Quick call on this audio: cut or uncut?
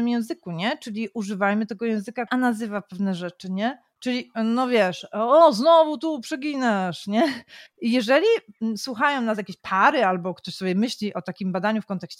cut